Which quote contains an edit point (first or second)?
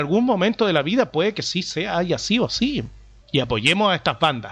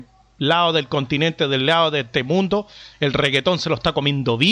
first